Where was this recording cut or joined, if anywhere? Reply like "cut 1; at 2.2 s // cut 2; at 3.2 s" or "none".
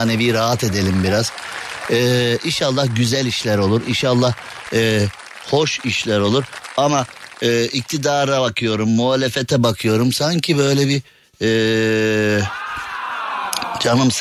none

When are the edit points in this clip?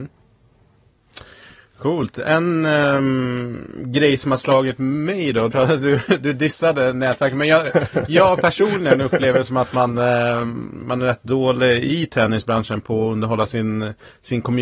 cut 1; at 5.5 s

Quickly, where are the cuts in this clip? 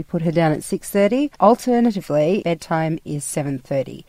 cut 1; at 1.3 s // cut 2; at 2.4 s

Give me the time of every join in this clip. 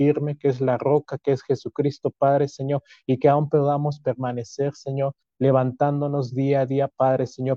none

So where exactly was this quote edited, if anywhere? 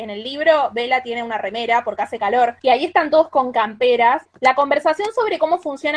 cut 1; at 4.2 s

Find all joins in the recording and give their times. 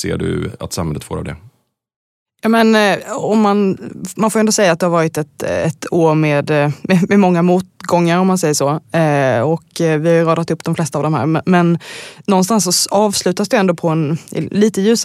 none

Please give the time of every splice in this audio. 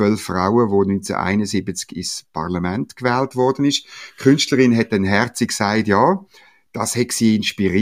none

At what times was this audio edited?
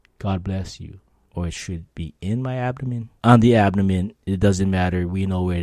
cut 1; at 1.3 s // cut 2; at 3.2 s

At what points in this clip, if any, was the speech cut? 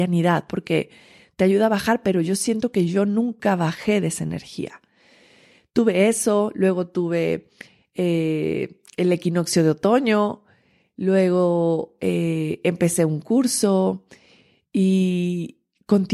none

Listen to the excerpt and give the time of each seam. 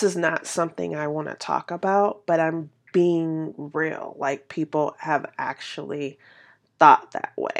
none

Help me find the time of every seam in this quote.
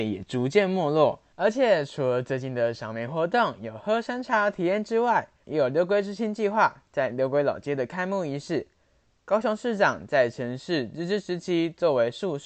cut 1; at 1.3 s // cut 2; at 5.4 s

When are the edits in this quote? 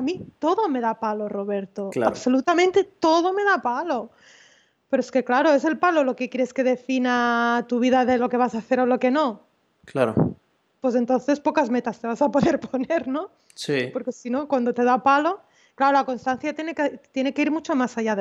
none

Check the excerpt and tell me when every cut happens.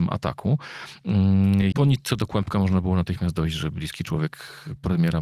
cut 1; at 1.7 s

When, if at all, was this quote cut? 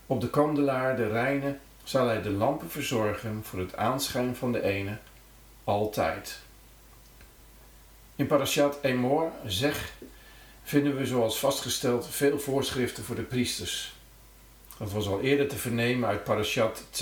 none

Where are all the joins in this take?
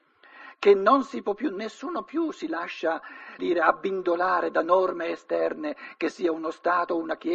cut 1; at 3.4 s

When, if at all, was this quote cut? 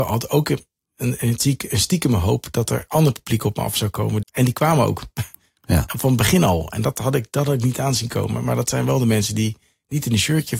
cut 1; at 4.2 s

